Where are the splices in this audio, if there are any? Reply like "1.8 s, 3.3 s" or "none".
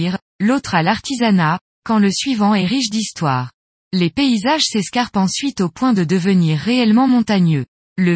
3.8 s